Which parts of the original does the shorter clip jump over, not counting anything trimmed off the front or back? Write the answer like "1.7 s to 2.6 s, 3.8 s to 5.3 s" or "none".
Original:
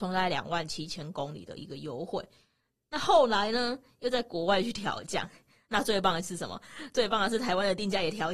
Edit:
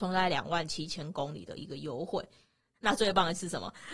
2.8 s to 5.6 s